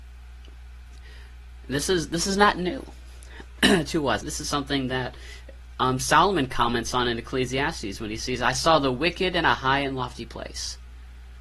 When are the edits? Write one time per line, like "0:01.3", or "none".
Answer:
0:04.2